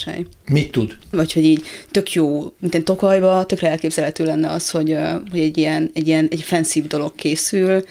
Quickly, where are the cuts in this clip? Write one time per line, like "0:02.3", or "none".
0:01.1